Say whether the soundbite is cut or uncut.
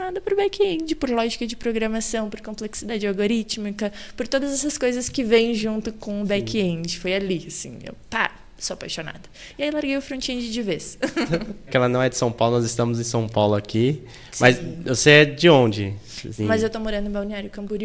cut